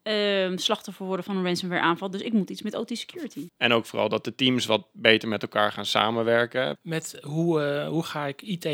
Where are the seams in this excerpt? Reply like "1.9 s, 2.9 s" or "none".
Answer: 3.5 s, 6.7 s